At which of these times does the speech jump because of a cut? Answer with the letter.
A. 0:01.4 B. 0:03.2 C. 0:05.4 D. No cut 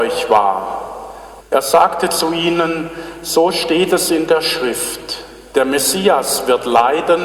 A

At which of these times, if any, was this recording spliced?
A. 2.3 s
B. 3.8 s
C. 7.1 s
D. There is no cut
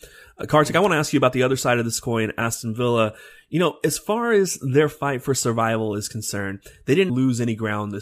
C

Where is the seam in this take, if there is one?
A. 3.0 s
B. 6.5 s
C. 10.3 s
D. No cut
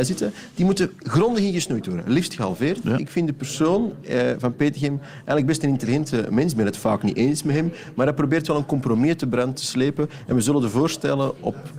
A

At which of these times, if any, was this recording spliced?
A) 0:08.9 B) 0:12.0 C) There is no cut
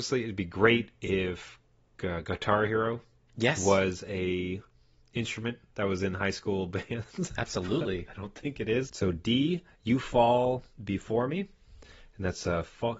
A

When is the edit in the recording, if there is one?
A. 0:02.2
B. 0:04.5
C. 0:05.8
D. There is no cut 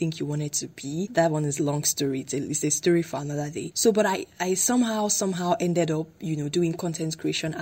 D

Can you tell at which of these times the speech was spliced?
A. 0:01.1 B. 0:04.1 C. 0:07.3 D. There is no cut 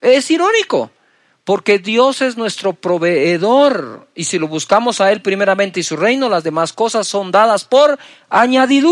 D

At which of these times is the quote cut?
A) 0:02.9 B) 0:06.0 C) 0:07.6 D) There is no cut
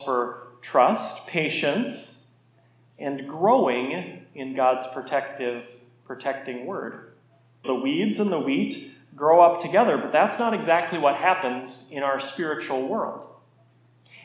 C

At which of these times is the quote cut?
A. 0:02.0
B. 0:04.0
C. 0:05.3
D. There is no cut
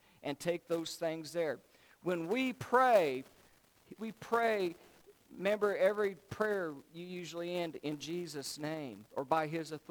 B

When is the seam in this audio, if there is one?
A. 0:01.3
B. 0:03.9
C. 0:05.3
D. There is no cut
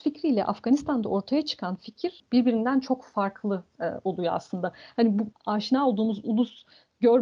C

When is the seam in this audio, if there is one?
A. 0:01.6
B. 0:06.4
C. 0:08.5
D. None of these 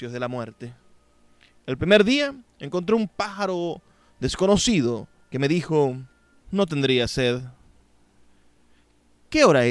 B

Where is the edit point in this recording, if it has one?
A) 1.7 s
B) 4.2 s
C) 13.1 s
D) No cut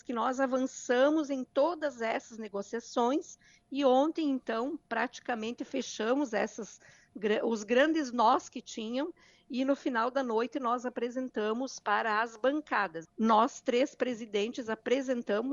C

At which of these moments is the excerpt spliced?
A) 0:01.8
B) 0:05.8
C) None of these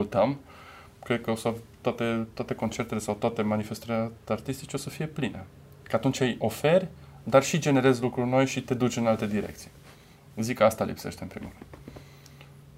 C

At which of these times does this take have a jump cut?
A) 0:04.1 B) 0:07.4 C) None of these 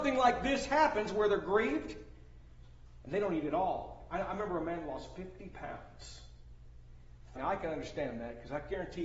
B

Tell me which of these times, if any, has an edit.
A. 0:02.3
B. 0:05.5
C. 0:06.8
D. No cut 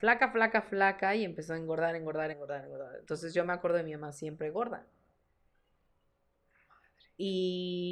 A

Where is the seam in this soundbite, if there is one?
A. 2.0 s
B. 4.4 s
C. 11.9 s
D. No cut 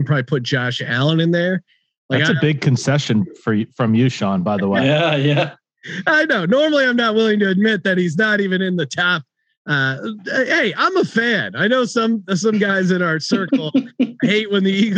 D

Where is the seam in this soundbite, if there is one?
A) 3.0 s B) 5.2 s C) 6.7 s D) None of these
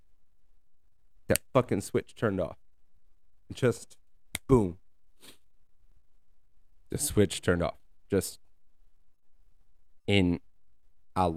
D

